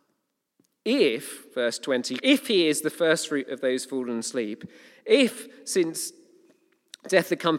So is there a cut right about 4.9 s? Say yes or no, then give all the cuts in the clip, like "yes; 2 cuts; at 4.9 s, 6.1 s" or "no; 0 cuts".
no; 1 cut; at 2.2 s